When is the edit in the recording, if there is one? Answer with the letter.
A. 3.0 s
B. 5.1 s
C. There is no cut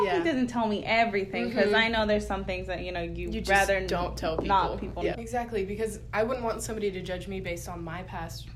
B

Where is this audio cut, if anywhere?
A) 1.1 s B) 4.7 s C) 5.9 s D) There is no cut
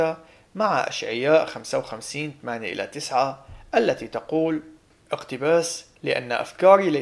C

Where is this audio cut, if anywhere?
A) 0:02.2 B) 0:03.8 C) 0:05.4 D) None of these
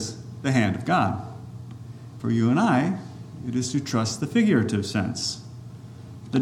A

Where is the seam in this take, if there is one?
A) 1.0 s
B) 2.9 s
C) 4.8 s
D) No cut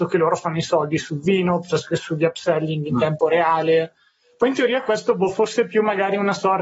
D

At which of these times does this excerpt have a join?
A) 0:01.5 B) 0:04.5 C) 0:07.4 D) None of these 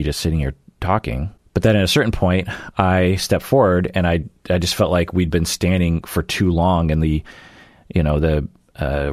D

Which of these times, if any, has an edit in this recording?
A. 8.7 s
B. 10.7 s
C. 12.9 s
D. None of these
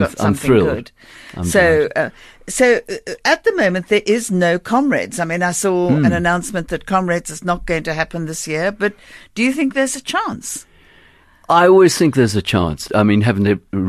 C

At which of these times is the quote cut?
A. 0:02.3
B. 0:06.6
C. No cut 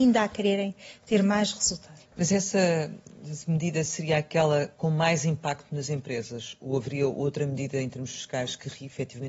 C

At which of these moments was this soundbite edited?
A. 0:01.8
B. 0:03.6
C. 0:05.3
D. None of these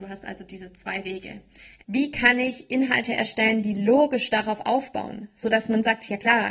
A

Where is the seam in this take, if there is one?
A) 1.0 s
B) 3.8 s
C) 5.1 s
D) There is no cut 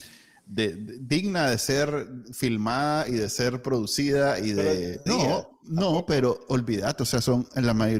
C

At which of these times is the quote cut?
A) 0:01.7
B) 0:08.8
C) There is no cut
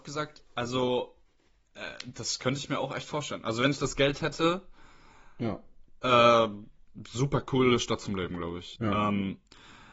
B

